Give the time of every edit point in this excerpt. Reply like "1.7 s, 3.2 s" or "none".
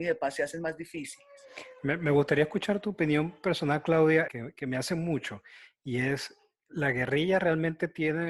4.3 s